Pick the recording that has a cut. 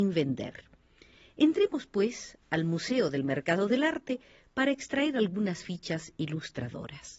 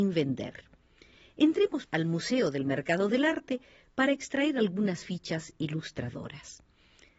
second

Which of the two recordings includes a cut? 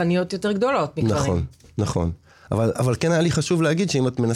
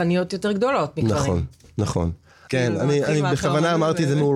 second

